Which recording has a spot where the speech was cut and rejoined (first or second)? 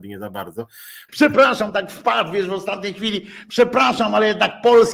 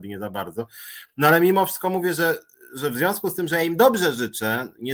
first